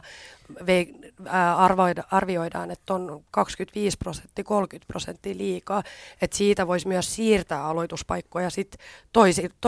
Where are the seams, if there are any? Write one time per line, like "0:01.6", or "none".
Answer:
none